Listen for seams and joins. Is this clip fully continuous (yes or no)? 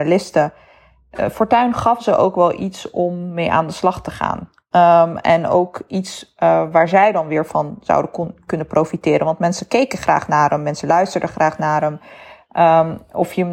yes